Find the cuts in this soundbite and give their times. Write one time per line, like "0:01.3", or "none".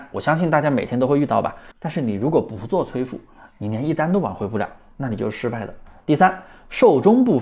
0:01.7